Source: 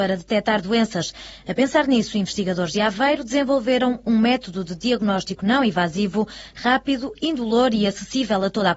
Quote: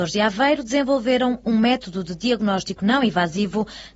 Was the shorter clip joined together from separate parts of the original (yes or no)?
no